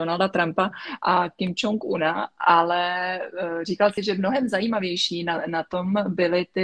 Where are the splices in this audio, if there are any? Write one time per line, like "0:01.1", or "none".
none